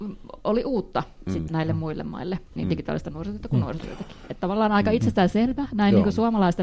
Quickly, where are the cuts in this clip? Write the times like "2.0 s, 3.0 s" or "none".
1.5 s, 2.6 s